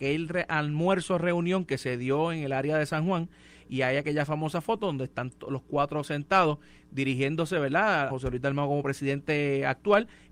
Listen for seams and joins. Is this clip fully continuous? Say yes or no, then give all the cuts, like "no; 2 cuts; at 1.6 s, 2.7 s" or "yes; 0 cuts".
no; 1 cut; at 8.1 s